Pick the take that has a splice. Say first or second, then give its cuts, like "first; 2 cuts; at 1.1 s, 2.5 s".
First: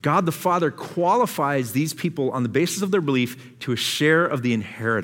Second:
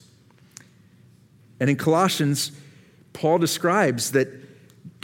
second; 1 cut; at 1.4 s